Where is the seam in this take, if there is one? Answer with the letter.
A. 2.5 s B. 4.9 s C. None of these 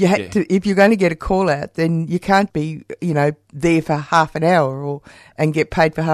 A